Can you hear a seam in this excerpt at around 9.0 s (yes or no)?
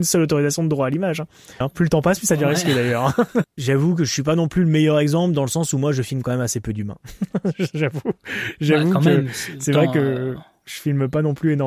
no